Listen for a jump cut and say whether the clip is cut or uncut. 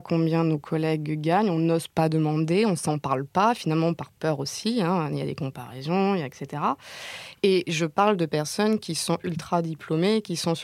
cut